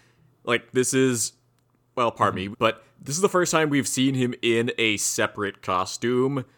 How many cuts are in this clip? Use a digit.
1